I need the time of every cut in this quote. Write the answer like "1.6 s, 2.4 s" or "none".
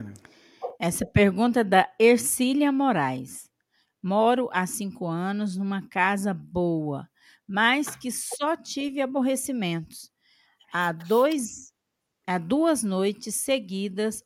3.9 s